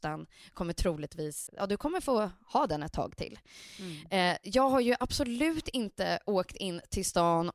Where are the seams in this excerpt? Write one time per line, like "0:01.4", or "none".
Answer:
0:01.5